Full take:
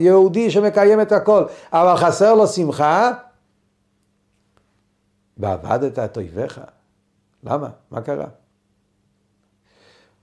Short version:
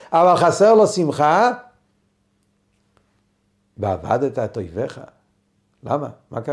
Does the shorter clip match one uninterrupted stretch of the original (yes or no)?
yes